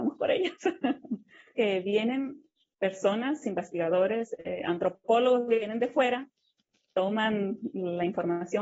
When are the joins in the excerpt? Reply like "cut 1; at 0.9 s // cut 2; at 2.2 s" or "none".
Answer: cut 1; at 1.5 s // cut 2; at 3.4 s